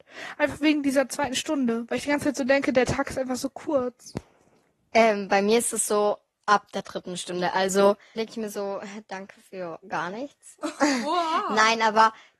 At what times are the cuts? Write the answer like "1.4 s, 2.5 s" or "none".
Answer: 8.2 s